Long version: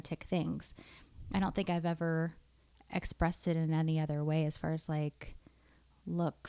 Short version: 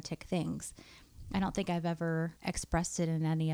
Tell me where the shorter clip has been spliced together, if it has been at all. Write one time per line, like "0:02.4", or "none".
0:02.4